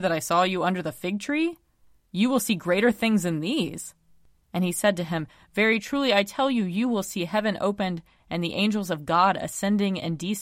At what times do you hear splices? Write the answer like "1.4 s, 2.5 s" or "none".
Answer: none